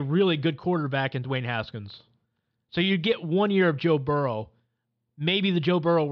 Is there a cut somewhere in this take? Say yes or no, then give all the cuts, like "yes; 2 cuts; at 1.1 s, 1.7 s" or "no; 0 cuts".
yes; 1 cut; at 2.6 s